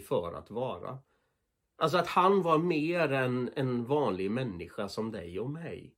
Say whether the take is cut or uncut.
uncut